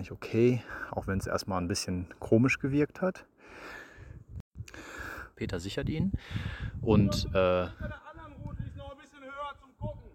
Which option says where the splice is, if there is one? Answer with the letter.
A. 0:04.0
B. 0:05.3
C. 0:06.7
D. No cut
B